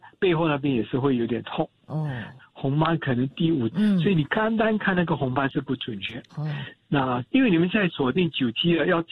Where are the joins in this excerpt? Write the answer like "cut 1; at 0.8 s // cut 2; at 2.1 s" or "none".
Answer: cut 1; at 2.4 s // cut 2; at 3.7 s // cut 3; at 6.3 s